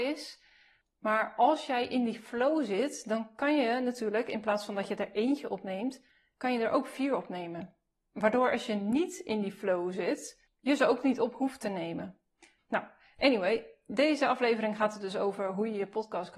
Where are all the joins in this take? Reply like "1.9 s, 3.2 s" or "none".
12.6 s